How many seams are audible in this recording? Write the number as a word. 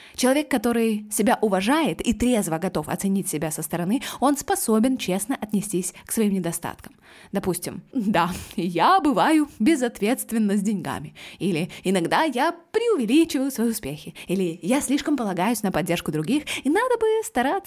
one